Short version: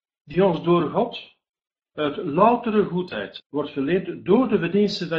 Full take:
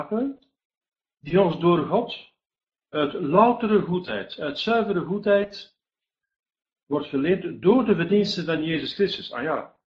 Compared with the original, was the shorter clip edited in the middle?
yes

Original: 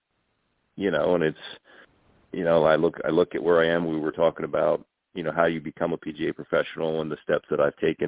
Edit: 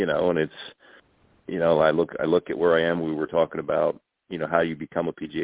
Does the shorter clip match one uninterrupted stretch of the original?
yes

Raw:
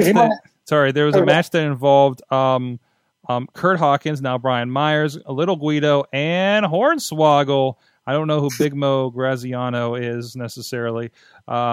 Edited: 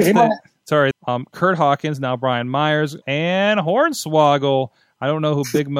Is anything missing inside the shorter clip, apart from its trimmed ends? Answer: yes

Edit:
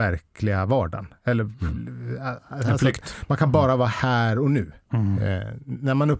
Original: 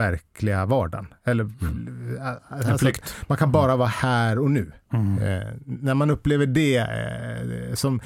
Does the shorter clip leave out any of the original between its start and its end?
no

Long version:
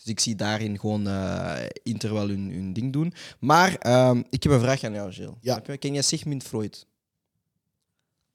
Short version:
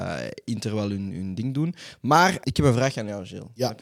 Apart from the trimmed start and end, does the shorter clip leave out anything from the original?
yes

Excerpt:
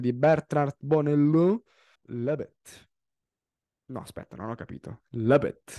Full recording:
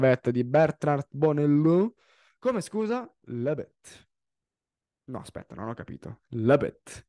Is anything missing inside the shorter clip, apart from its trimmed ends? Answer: yes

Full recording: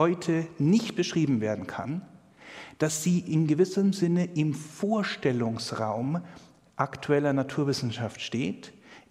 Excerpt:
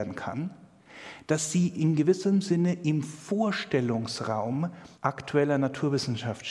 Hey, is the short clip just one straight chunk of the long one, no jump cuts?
no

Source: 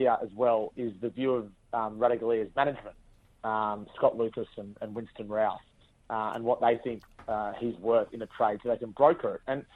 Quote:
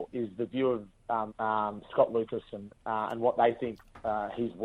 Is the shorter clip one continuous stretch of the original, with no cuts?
no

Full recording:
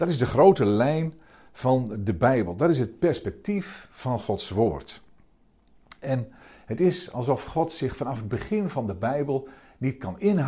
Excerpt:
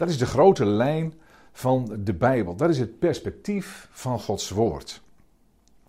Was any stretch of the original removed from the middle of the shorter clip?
no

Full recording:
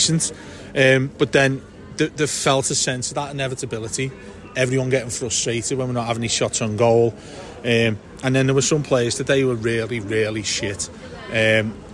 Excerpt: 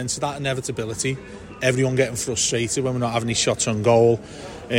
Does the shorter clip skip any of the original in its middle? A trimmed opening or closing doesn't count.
no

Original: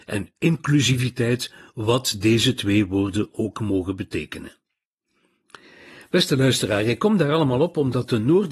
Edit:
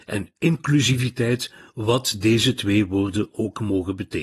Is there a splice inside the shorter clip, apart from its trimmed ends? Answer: no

